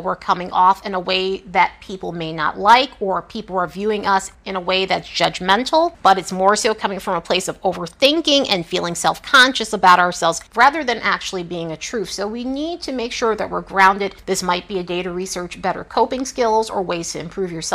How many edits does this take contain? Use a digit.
0